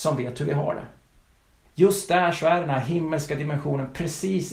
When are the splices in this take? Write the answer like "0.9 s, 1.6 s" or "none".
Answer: 1.6 s